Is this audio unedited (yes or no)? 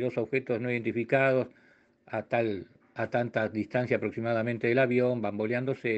yes